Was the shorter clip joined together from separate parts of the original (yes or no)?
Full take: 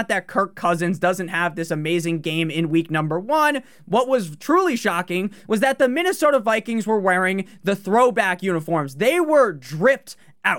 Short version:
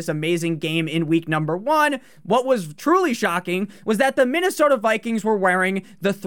no